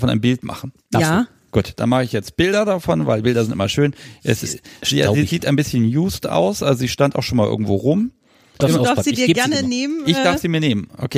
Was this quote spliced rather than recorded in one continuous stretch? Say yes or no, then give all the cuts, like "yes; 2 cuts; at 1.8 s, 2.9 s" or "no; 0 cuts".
yes; 1 cut; at 8.6 s